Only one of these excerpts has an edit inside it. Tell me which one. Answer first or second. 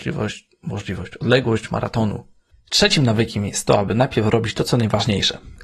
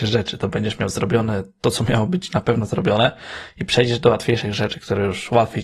first